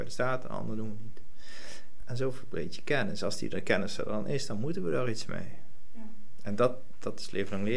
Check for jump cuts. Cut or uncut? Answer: uncut